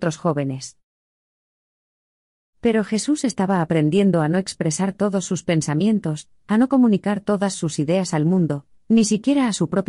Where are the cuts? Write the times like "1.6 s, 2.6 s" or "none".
none